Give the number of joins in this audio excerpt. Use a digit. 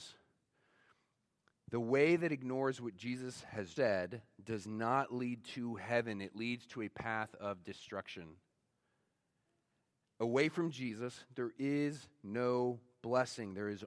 1